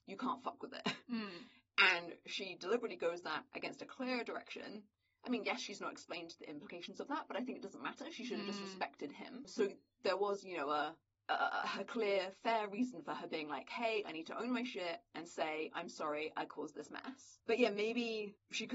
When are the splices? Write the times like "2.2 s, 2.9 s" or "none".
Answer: none